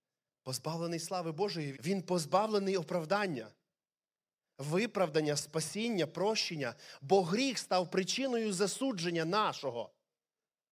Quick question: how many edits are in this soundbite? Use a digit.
1